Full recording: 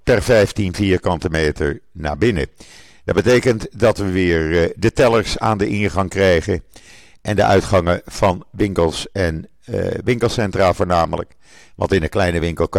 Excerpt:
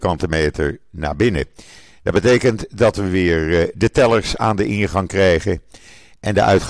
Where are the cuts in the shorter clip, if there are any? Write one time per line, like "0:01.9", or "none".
none